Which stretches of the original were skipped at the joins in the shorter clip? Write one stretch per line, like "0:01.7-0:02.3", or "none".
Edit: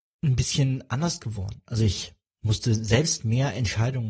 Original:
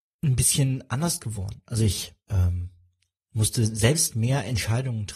0:02.2-0:03.1

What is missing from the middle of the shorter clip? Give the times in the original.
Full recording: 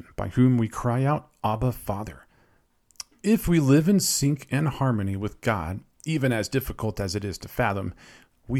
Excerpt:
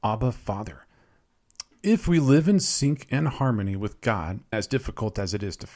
0:05.9-0:06.3

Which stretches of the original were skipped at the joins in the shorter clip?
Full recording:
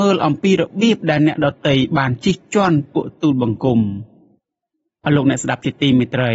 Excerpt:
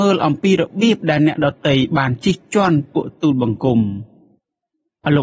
none

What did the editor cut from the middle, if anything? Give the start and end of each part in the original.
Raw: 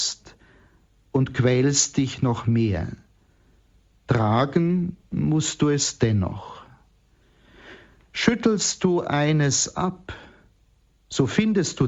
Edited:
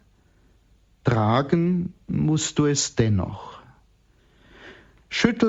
none

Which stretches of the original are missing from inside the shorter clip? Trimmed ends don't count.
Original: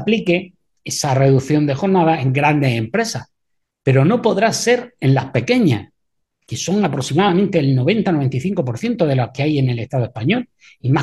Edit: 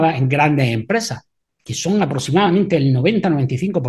0:03.5-0:06.2

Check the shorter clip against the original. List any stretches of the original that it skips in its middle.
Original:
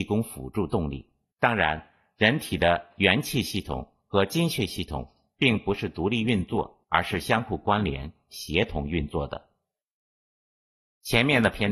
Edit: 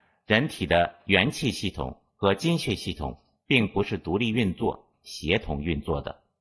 0:06.8-0:08.2

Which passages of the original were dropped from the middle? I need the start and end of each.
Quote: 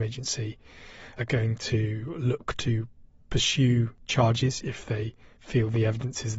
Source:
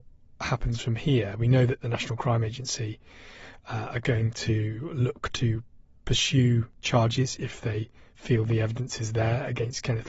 0:03.6-0:03.9

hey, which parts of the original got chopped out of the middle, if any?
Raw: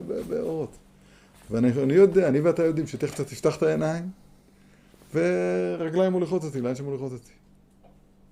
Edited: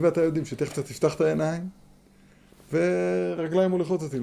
none

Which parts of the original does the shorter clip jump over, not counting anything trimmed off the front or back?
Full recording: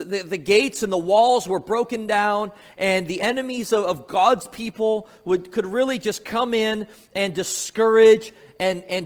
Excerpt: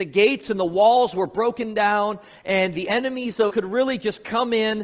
0:03.8-0:05.5

